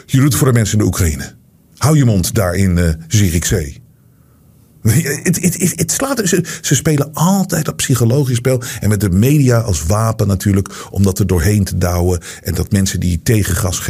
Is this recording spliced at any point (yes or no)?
no